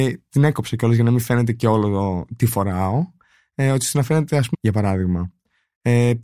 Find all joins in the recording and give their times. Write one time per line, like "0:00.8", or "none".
0:04.5